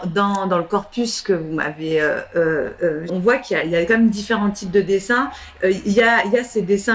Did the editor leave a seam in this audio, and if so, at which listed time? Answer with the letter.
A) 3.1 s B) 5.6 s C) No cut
A